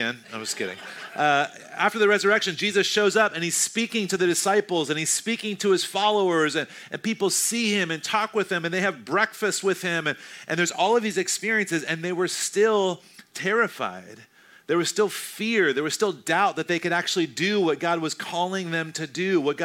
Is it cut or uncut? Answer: uncut